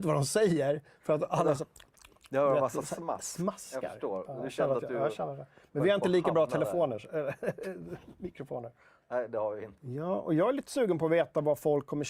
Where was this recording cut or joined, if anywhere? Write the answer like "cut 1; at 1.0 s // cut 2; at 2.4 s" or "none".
cut 1; at 9.8 s